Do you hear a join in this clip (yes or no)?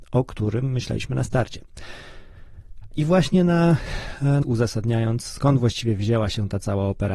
yes